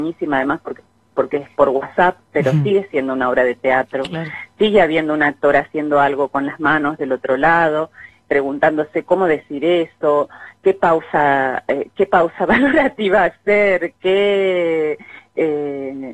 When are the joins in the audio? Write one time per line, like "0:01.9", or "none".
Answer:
0:10.6